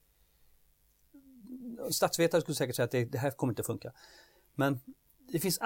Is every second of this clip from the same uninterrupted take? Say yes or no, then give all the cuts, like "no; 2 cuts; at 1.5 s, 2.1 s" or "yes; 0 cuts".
yes; 0 cuts